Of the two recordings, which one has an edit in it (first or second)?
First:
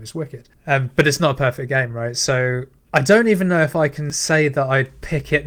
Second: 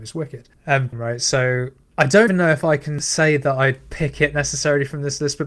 second